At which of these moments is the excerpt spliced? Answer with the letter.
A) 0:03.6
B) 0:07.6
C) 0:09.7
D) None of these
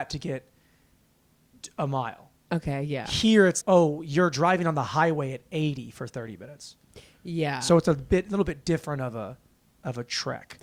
A